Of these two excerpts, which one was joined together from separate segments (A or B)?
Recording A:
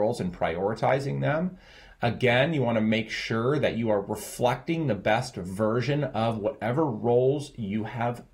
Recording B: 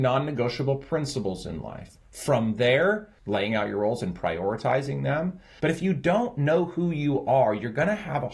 B